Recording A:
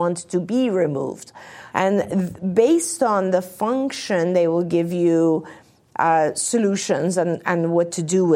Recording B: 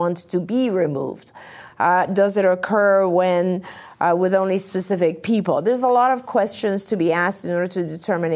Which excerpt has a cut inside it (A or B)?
A